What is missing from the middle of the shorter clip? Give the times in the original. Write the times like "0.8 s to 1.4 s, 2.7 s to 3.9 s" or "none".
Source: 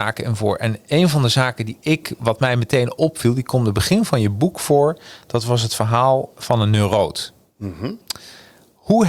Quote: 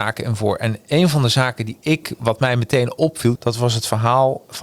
3.4 s to 5.2 s